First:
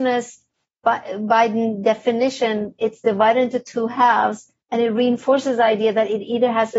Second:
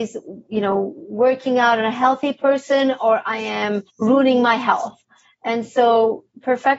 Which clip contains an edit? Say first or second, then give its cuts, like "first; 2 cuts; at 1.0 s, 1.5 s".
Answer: second; 1 cut; at 3.9 s